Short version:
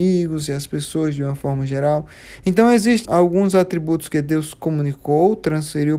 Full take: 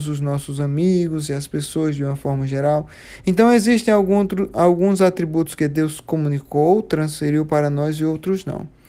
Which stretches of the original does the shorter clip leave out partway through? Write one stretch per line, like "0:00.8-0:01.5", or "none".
0:03.9-0:04.5